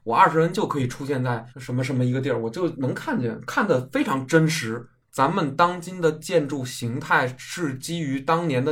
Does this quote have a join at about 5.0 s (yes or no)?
yes